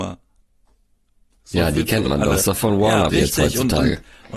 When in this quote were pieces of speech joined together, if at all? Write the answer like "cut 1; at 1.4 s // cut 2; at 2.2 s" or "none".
cut 1; at 3.1 s